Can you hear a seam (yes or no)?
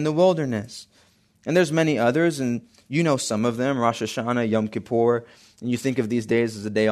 no